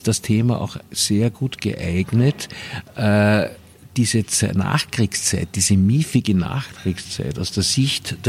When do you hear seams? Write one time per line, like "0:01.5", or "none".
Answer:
none